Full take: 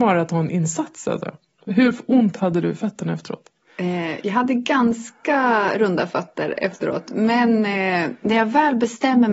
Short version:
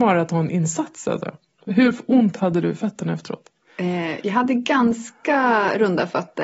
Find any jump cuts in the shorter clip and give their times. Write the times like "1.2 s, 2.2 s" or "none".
none